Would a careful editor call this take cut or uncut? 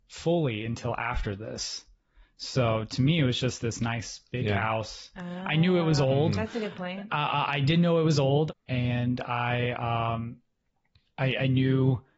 cut